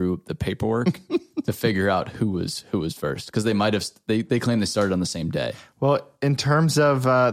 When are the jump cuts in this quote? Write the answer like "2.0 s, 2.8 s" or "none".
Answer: none